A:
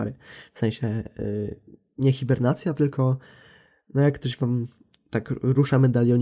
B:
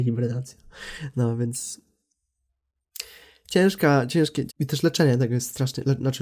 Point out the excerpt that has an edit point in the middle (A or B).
B